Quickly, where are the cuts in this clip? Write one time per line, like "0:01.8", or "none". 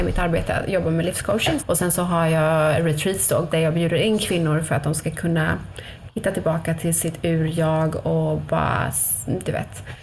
0:01.6
0:03.5